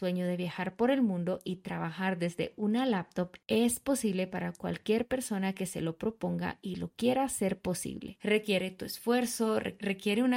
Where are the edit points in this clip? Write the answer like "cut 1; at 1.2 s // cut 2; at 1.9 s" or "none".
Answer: cut 1; at 8.2 s